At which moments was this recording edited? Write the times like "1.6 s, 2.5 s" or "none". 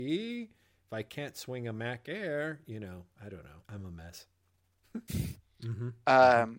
3.6 s, 5.4 s